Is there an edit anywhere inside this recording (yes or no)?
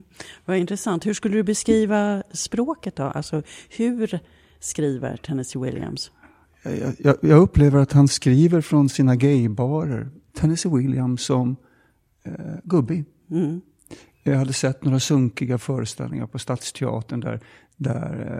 yes